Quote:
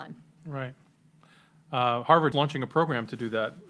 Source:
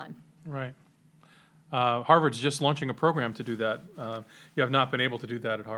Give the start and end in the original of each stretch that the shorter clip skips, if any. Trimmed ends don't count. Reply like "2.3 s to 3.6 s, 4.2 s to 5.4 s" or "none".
2.3 s to 2.6 s

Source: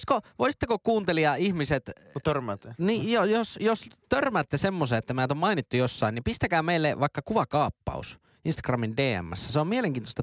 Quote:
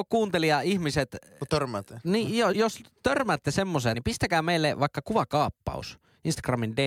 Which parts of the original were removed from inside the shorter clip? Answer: 3.3 s to 3.6 s, 5.0 s to 6.1 s

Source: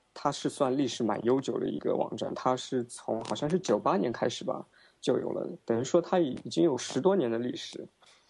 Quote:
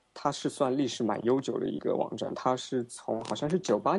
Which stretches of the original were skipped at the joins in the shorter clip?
none

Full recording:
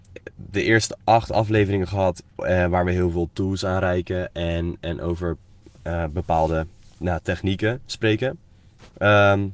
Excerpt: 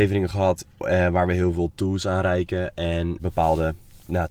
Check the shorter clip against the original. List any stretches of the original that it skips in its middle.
4.8 s to 6.1 s

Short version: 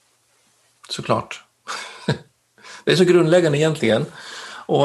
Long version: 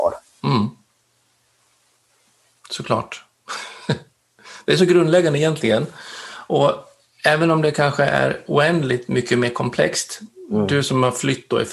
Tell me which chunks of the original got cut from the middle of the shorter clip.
none

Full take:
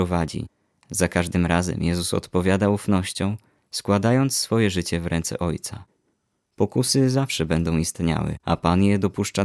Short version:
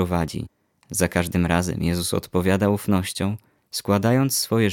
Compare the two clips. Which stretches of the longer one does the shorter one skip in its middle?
none

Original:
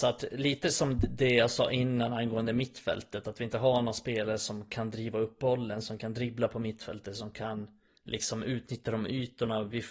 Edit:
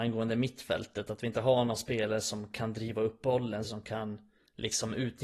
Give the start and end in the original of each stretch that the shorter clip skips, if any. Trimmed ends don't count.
5.8 s to 7.1 s

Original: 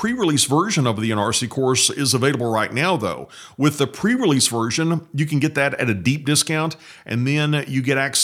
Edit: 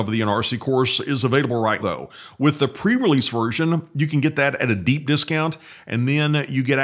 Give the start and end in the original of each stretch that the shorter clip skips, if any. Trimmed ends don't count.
2.7 s to 3.0 s

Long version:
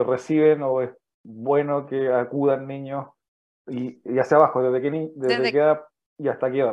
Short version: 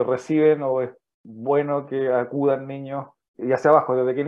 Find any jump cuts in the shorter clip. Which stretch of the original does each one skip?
3.3 s to 4.0 s

